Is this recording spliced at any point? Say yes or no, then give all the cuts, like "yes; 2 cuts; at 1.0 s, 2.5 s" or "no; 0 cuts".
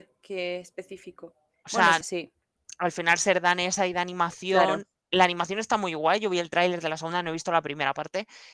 yes; 1 cut; at 2.0 s